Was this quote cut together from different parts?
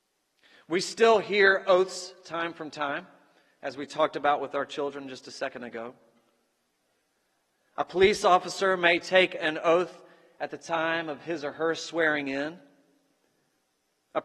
no; 0 cuts

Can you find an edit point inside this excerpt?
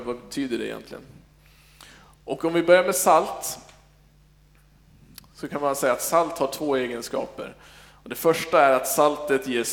no; 0 cuts

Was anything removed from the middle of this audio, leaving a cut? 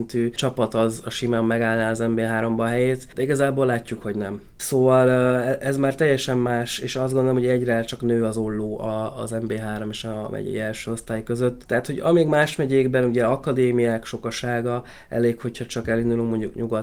yes; 1 cut; at 11.6 s

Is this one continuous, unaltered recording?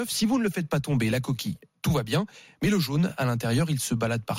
yes; 0 cuts

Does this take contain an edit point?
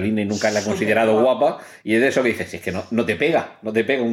no; 0 cuts

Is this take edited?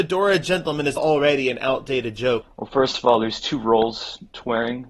yes; 2 cuts; at 1.0 s, 2.4 s

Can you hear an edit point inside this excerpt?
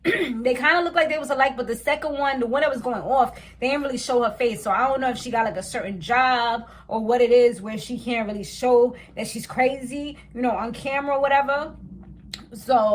no; 0 cuts

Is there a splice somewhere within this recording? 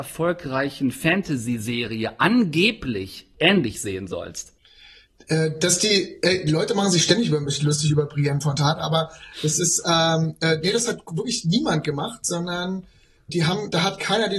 yes; 1 cut; at 13.3 s

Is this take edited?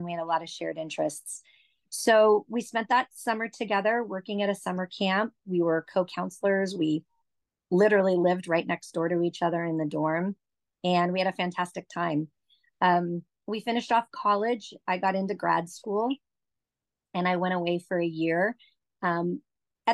no; 0 cuts

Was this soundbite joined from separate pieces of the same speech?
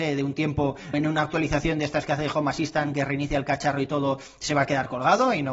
yes; 1 cut; at 0.9 s

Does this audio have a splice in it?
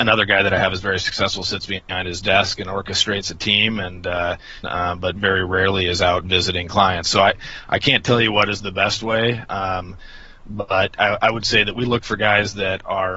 yes; 2 cuts; at 4.6 s, 11.0 s

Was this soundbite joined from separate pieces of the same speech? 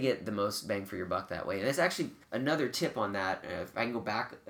yes; 1 cut; at 2.2 s

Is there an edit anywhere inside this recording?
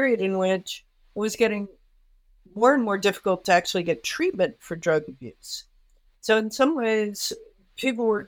no; 0 cuts

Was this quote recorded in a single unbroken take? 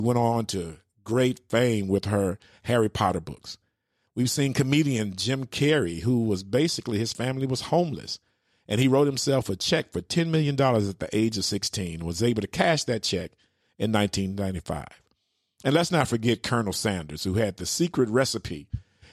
yes; 0 cuts

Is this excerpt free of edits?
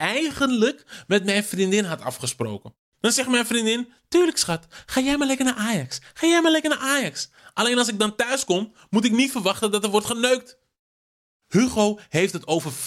yes; 0 cuts

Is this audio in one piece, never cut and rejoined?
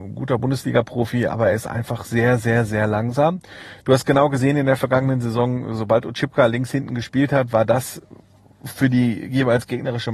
yes; 0 cuts

